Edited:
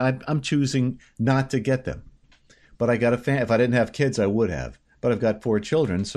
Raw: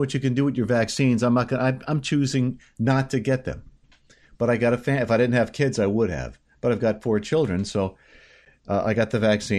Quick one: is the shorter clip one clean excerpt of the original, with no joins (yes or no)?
yes